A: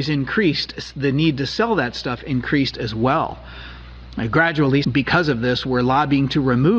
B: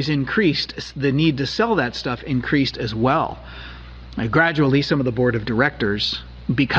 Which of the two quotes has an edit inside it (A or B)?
A